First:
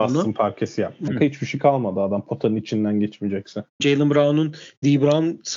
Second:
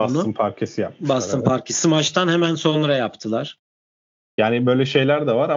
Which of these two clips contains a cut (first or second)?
first